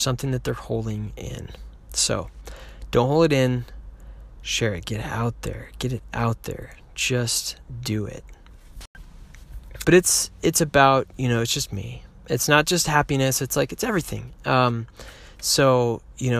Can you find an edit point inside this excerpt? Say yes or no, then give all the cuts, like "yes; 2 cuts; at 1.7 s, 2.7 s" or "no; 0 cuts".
yes; 1 cut; at 9.8 s